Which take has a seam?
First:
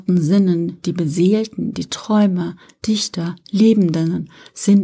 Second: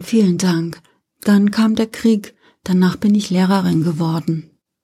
second; 1 cut; at 1.0 s

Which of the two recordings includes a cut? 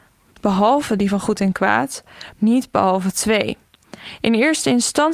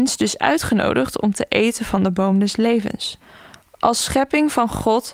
first; 1 cut; at 2.3 s

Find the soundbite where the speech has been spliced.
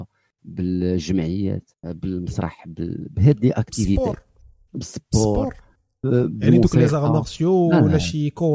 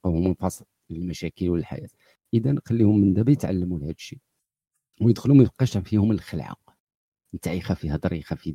first; 1 cut; at 1.7 s

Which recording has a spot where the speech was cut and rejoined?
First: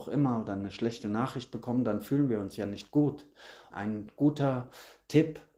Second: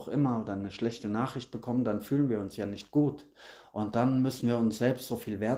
first; 1 cut; at 3.7 s

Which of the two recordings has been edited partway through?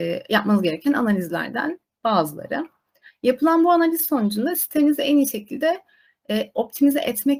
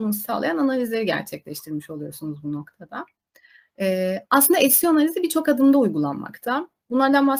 first; 1 cut; at 3.1 s

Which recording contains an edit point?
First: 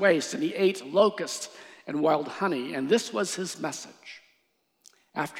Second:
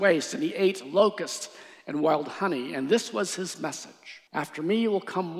second; 1 cut; at 4.3 s

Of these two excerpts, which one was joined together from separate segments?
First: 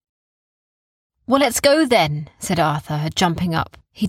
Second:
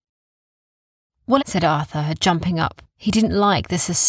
second; 1 cut; at 1.4 s

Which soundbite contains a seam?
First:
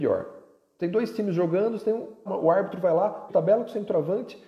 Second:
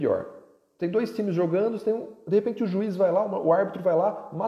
first; 2 cuts; at 2.3 s, 3.3 s

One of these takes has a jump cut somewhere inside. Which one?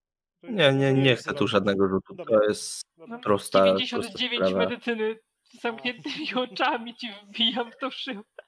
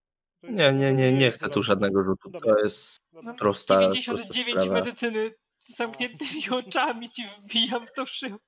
first; 1 cut; at 0.9 s

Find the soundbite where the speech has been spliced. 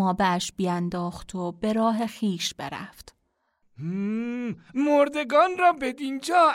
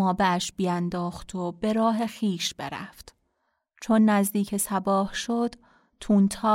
first; 1 cut; at 3.6 s

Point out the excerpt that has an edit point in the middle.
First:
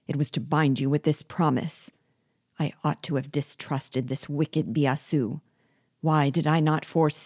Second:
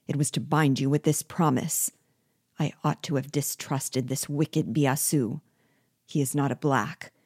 second; 1 cut; at 6.0 s

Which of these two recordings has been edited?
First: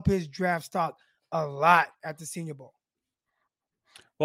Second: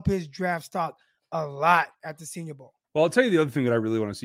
second; 1 cut; at 2.8 s

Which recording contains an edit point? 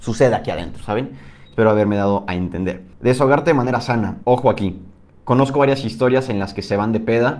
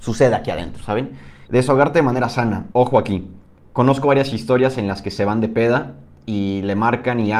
second; 1 cut; at 1.5 s

